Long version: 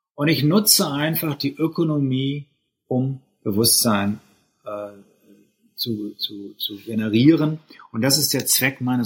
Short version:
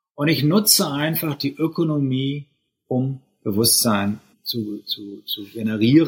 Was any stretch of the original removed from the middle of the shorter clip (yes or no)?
yes